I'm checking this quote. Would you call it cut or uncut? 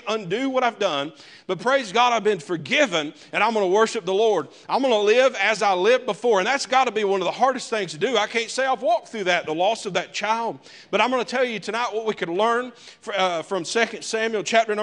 uncut